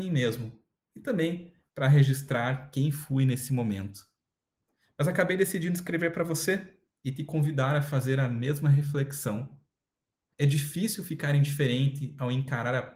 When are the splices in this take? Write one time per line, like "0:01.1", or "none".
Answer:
0:00.9
0:10.3